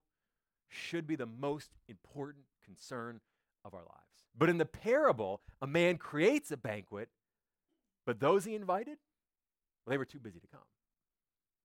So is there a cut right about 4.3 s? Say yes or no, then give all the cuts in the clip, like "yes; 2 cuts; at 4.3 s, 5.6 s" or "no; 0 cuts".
yes; 1 cut; at 4.3 s